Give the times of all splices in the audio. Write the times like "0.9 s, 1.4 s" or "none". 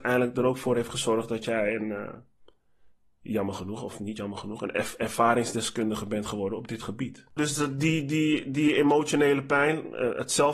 7.4 s